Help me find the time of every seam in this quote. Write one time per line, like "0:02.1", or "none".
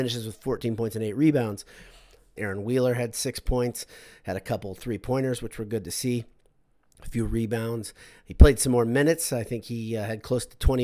0:02.4